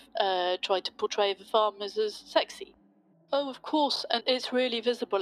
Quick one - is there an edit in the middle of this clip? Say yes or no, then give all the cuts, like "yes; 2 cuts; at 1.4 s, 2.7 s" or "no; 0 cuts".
yes; 2 cuts; at 3.1 s, 4.2 s